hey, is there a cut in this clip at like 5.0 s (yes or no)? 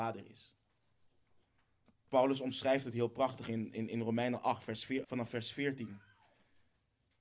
yes